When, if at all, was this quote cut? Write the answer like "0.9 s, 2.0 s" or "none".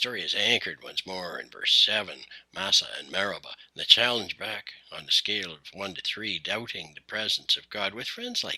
none